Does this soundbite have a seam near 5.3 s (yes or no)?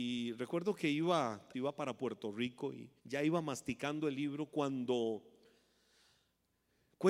no